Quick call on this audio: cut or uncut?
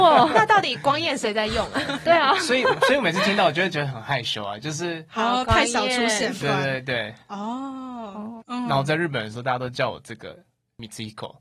cut